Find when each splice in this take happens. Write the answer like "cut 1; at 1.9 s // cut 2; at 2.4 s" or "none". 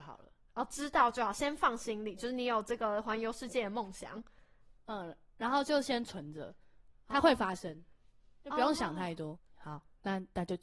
cut 1; at 9.3 s